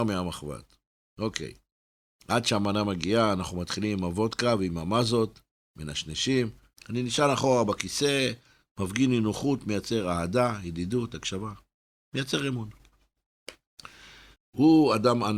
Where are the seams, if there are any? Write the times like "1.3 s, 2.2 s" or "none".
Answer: 6.7 s, 14.4 s